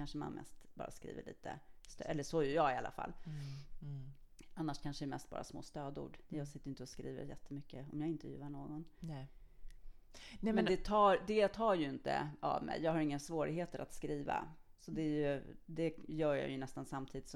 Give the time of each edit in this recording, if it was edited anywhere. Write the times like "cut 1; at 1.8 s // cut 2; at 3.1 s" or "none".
none